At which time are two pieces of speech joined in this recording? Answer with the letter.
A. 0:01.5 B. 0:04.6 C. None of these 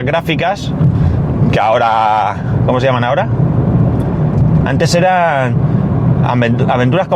B